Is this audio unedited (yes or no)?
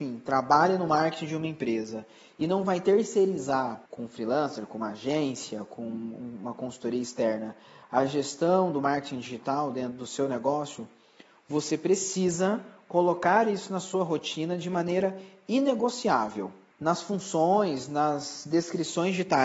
no